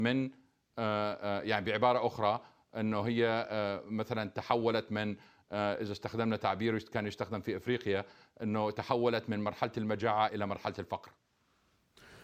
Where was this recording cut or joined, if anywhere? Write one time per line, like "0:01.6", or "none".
0:10.3